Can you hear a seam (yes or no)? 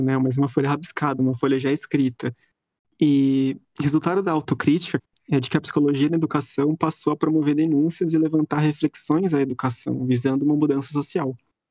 yes